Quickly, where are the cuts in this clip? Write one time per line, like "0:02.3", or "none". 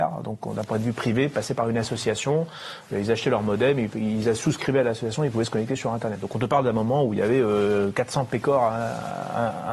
none